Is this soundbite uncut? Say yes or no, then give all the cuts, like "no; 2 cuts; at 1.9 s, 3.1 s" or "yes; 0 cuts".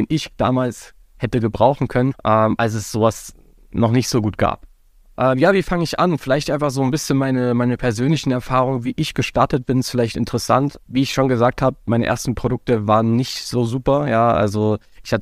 yes; 0 cuts